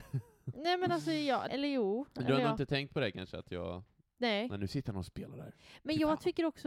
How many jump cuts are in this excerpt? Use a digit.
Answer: 1